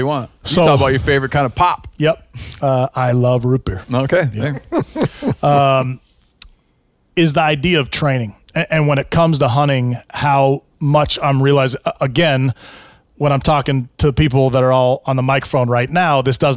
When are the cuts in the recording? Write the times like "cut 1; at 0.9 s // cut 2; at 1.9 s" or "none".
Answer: cut 1; at 13.9 s